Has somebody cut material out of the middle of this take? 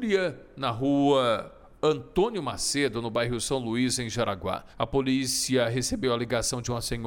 yes; 1 cut; at 4.7 s

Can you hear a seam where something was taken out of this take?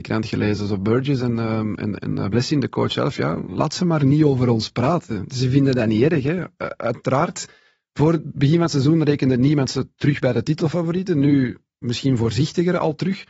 no; 0 cuts

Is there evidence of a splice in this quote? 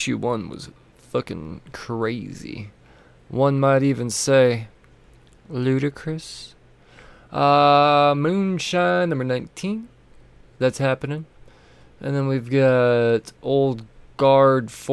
no; 0 cuts

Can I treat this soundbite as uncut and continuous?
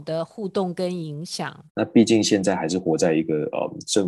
no; 1 cut; at 1.7 s

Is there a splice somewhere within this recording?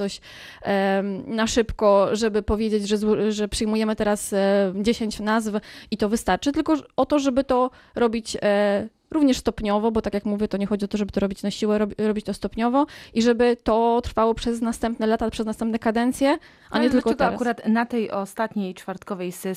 no; 0 cuts

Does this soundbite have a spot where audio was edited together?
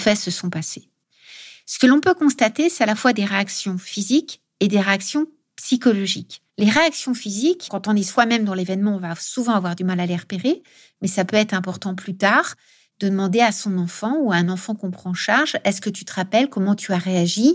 yes; 2 cuts; at 6.5 s, 7.7 s

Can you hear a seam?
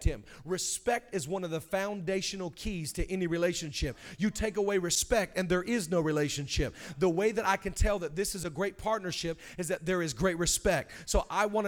no; 0 cuts

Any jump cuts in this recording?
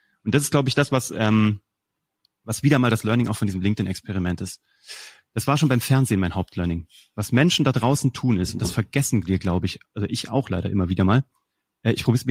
no; 0 cuts

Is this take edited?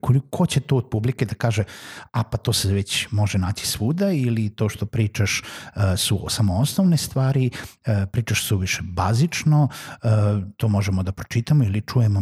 no; 0 cuts

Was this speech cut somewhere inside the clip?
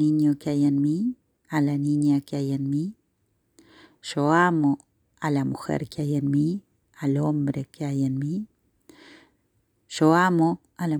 no; 0 cuts

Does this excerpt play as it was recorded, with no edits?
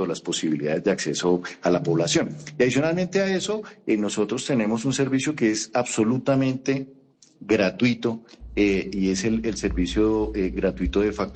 yes; 0 cuts

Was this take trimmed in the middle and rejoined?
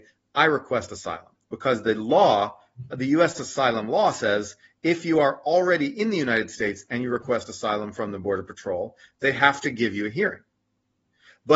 yes; 1 cut; at 1.4 s

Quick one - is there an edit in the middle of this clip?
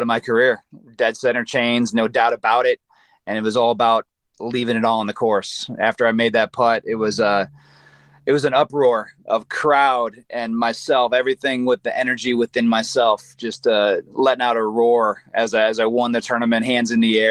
no; 0 cuts

